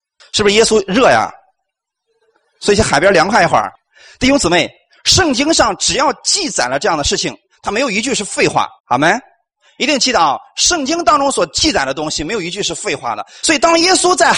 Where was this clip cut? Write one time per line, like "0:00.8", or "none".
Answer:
0:08.8
0:13.4